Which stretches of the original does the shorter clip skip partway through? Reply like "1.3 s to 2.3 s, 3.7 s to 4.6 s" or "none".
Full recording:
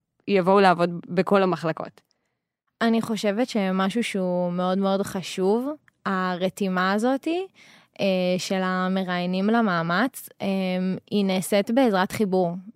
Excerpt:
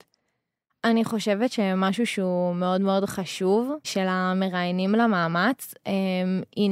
5.8 s to 8.4 s